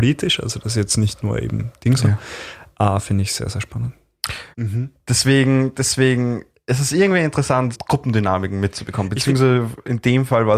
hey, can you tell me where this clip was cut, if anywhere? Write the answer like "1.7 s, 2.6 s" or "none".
4.5 s, 7.7 s